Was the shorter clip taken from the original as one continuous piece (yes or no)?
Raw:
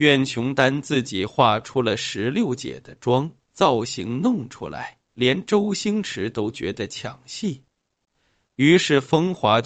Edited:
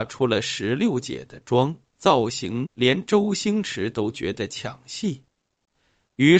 no